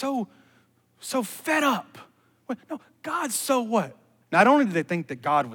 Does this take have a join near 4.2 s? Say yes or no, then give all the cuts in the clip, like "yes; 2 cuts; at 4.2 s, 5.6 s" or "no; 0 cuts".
yes; 1 cut; at 4.2 s